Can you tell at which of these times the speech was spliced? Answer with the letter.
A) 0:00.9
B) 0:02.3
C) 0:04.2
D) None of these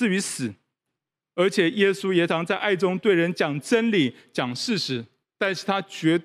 B